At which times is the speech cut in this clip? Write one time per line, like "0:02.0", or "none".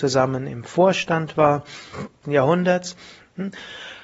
0:02.2

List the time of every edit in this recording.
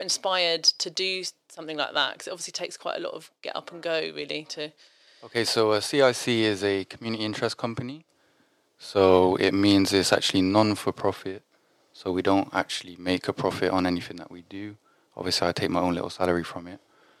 none

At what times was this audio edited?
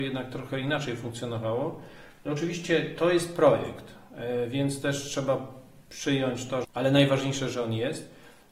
0:02.3
0:06.6

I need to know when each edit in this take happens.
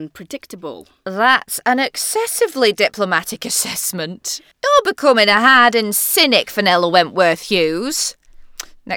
0:04.5

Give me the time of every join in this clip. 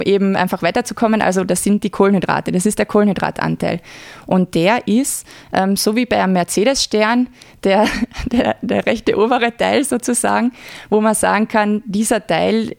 none

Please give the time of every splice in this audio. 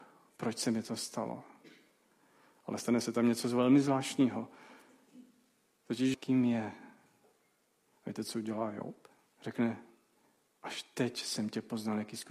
0:06.1
0:09.3

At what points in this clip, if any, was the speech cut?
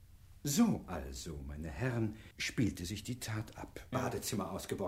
0:02.3
0:03.9

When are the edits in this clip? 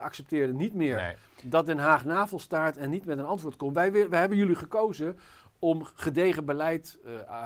none

